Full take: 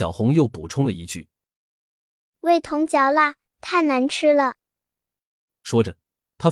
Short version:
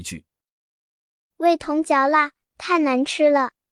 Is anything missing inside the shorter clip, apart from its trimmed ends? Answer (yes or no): no